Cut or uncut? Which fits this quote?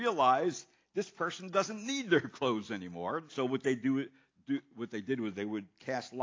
cut